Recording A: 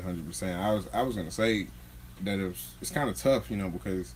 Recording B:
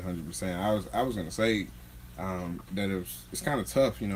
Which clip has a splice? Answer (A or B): A